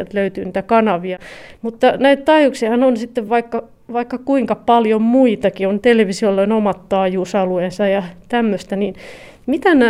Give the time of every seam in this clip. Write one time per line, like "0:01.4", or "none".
none